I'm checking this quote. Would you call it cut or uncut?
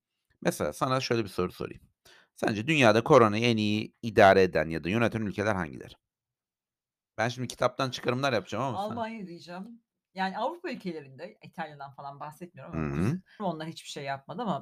cut